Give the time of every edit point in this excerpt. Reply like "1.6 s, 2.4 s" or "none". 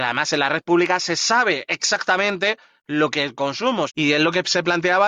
3.9 s